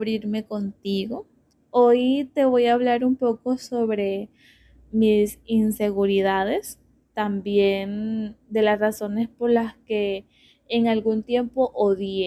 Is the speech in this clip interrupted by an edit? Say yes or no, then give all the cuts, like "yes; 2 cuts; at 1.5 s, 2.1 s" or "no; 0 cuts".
yes; 1 cut; at 1.5 s